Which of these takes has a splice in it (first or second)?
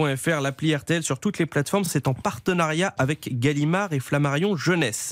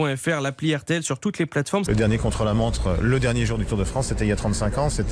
second